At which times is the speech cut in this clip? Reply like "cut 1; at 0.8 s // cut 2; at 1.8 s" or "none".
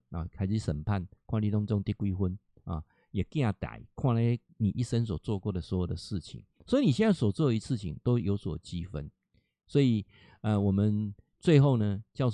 none